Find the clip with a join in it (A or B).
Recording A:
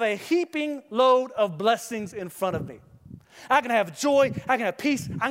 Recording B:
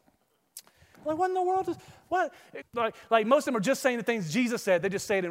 B